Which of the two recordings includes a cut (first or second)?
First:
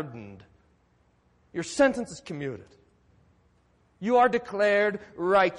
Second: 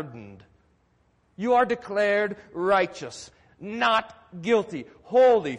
second